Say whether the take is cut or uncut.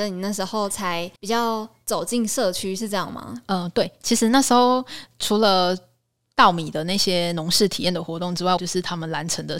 cut